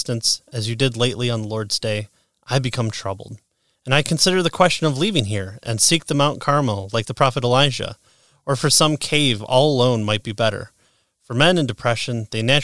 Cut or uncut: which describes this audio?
uncut